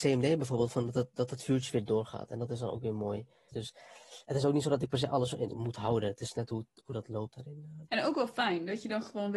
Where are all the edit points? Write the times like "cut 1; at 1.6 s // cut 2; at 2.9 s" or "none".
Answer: cut 1; at 3.5 s // cut 2; at 5.5 s // cut 3; at 7.9 s